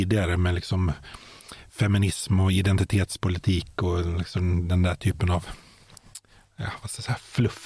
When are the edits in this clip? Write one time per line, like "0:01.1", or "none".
none